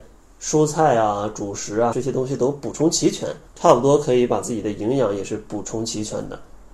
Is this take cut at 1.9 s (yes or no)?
yes